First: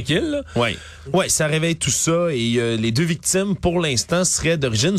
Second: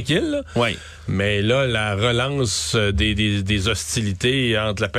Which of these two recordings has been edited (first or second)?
first